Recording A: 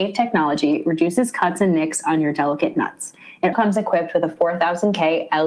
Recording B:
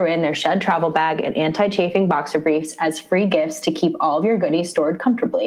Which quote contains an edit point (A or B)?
A